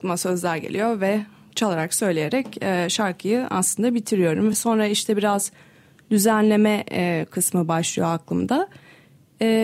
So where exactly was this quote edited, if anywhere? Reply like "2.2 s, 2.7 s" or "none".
none